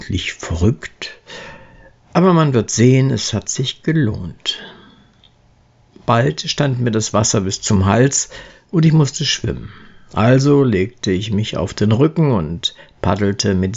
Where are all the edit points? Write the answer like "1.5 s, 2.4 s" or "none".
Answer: none